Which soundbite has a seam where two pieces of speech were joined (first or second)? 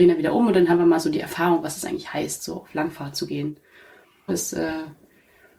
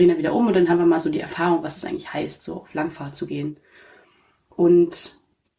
first